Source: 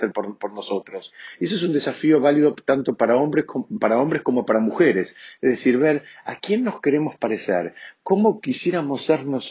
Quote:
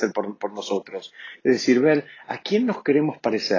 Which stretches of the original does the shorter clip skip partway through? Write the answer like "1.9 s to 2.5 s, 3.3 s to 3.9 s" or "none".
1.4 s to 5.3 s